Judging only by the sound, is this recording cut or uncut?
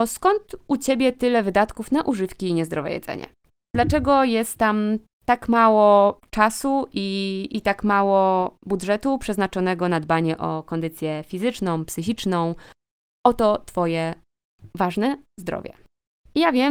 uncut